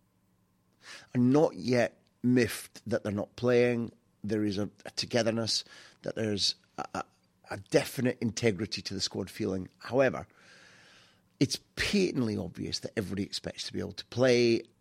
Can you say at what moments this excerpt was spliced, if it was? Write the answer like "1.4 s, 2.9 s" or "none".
none